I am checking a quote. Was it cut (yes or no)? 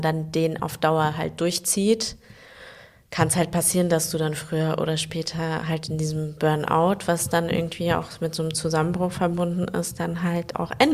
no